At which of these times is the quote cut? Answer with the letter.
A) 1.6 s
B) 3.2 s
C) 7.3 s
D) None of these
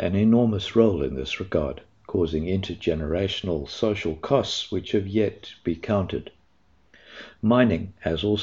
D